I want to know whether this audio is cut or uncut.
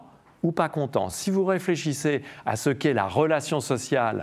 uncut